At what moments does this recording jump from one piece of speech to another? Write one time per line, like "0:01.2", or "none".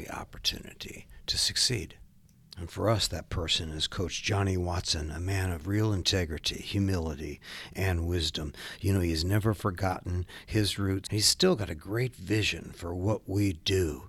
0:11.1